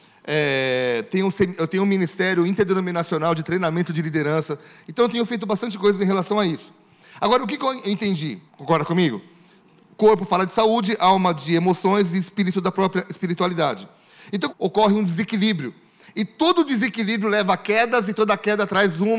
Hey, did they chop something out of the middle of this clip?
yes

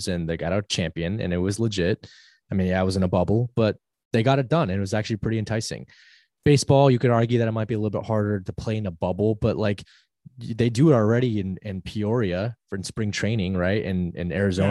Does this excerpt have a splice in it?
no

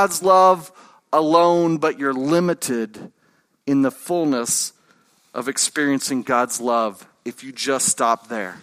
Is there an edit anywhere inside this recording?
no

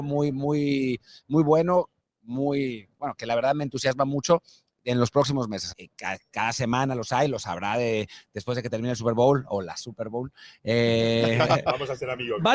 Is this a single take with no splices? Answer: no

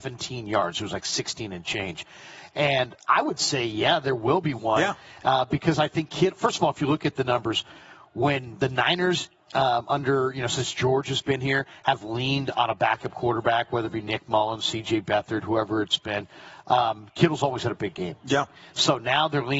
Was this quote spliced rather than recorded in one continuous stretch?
no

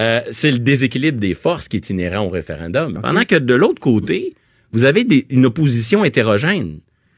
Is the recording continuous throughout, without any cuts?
no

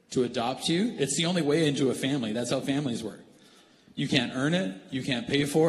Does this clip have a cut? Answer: no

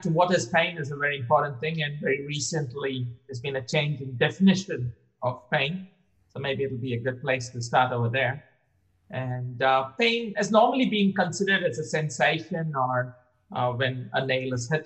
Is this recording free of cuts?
yes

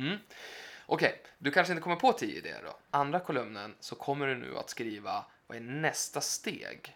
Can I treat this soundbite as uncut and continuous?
no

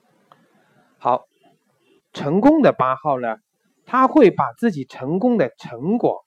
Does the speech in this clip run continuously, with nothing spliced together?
no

